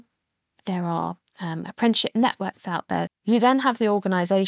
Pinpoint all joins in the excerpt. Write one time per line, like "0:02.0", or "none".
0:03.1